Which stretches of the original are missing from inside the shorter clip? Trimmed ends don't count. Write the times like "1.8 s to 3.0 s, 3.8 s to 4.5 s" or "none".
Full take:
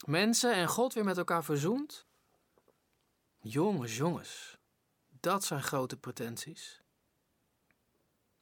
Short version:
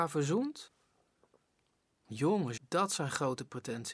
3.9 s to 5.1 s